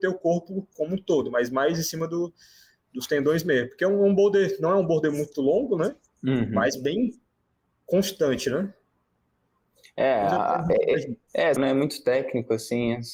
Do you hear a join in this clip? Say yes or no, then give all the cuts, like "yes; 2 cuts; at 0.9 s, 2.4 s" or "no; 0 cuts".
yes; 1 cut; at 11.6 s